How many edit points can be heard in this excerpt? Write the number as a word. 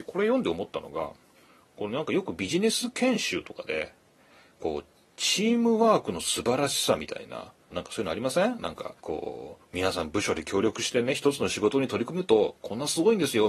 two